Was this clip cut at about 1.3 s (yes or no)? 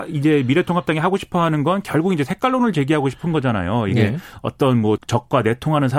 no